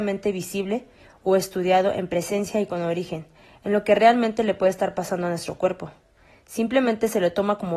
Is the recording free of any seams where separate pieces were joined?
yes; 0 cuts

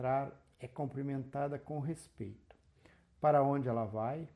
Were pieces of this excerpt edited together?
no; 0 cuts

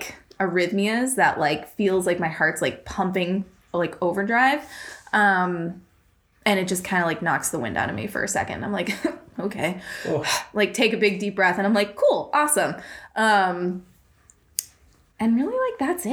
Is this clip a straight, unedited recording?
yes; 0 cuts

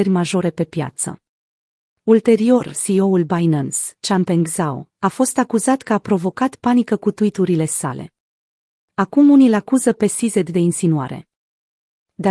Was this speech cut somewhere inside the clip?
no; 0 cuts

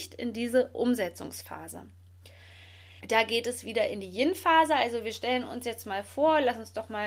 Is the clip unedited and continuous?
no; 1 cut; at 3.0 s

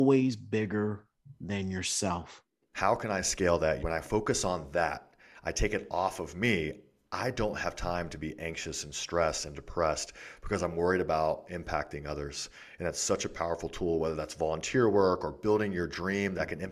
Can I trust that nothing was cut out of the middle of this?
no; 2 cuts; at 2.7 s, 3.8 s

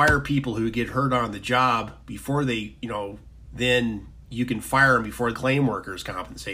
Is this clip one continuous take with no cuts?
no; 2 cuts; at 3.5 s, 5.3 s

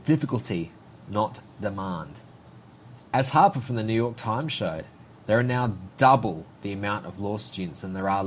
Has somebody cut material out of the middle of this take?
yes; 1 cut; at 3.0 s

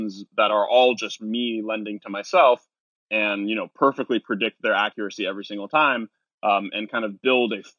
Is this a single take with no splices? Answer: yes; 0 cuts

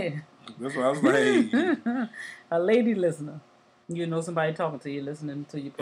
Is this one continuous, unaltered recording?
no; 1 cut; at 3.8 s

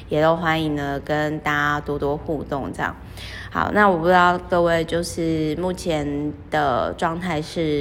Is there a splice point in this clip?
no; 0 cuts

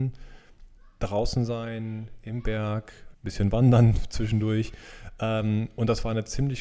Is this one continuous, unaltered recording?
no; 1 cut; at 3.1 s

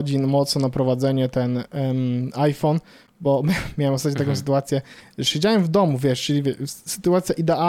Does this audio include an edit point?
no; 0 cuts

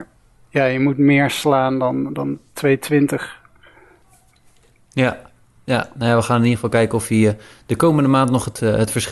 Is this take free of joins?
yes; 0 cuts

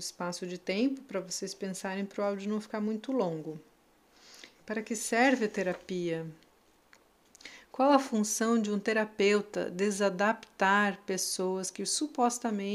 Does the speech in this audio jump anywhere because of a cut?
yes; 1 cut; at 4.6 s

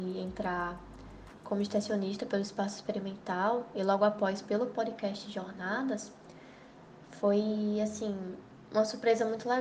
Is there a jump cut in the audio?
no; 0 cuts

